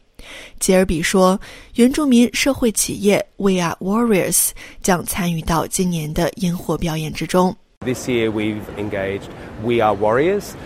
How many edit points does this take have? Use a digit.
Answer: 1